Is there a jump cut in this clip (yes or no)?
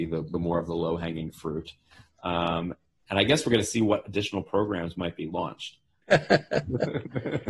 yes